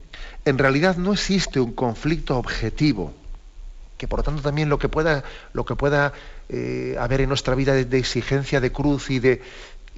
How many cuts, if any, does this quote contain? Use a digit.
1